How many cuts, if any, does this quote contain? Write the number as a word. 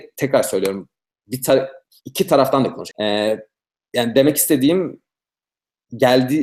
one